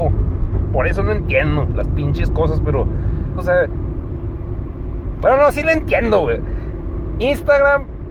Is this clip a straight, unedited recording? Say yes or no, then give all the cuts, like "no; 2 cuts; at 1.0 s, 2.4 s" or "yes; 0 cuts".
no; 1 cut; at 3.4 s